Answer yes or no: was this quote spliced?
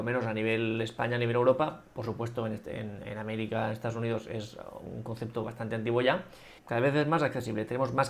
yes